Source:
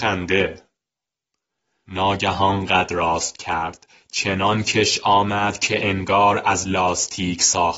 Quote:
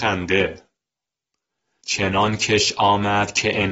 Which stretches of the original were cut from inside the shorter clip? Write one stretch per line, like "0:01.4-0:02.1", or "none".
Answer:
0:01.8-0:04.1